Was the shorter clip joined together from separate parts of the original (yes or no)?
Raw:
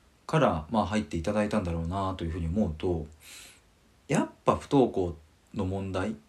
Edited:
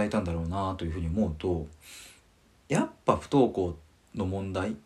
no